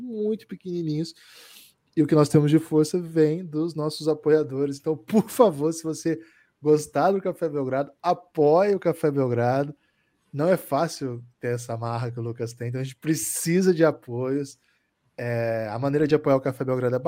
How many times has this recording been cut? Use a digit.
0